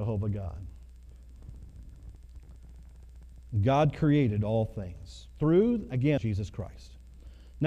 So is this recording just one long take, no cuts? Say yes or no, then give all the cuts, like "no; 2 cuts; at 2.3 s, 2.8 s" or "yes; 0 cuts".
no; 1 cut; at 6.2 s